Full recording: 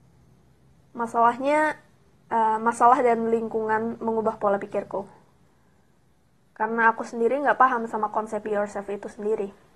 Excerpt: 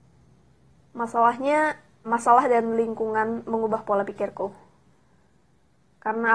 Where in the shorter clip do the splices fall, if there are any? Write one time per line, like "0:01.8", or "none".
0:02.1